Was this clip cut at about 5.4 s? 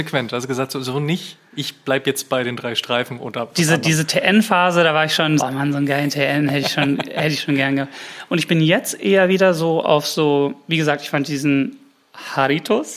yes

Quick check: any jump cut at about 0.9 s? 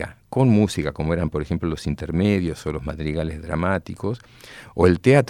no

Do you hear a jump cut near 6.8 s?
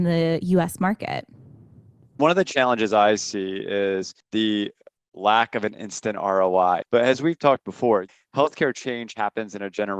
yes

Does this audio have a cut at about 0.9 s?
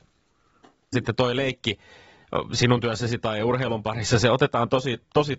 yes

